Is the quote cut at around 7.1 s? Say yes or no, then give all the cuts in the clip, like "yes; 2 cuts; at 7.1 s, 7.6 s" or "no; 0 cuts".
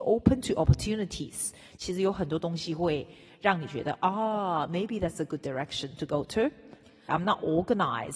yes; 1 cut; at 7.1 s